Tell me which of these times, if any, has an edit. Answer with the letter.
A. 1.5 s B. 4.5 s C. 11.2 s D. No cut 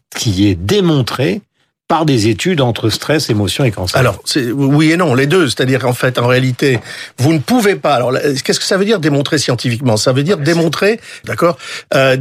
C